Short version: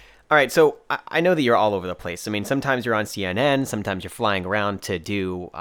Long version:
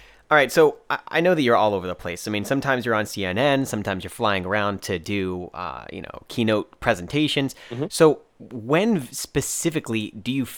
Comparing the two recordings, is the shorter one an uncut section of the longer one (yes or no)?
yes